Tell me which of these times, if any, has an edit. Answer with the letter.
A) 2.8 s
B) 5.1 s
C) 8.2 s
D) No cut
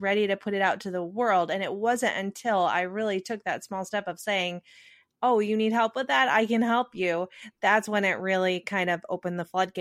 D